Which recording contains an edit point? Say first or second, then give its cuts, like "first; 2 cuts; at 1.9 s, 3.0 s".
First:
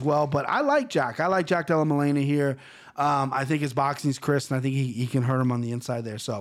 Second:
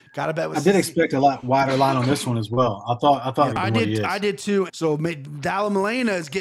second; 2 cuts; at 3.5 s, 4.7 s